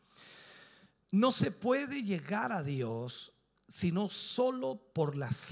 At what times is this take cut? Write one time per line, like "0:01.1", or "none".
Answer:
none

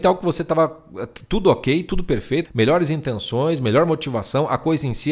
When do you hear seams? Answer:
0:02.4

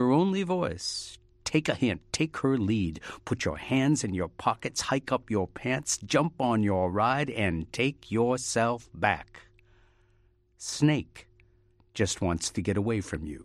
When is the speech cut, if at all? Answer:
none

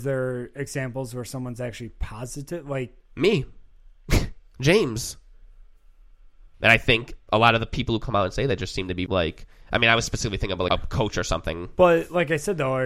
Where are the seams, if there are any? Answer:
0:06.5
0:09.1
0:10.7

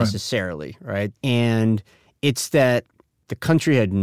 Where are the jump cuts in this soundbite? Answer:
0:01.1

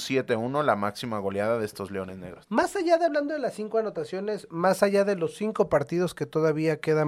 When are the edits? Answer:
0:02.4

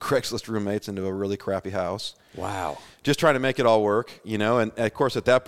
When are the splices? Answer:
none

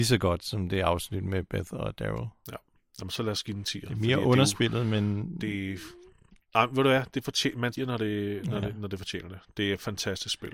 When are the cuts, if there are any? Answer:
0:07.8

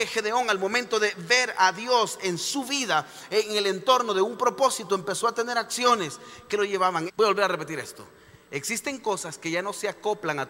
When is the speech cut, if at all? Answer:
0:07.1

